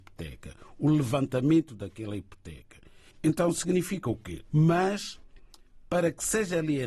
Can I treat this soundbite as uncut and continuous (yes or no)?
no